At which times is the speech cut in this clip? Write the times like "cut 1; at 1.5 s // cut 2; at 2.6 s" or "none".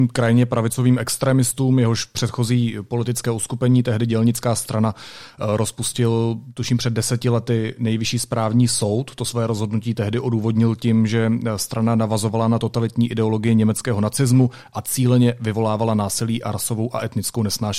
none